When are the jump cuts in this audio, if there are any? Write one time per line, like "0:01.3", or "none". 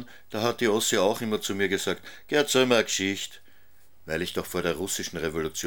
0:04.0